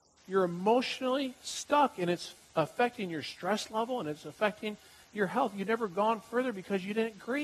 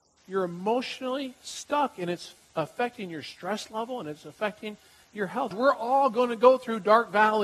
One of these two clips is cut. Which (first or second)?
second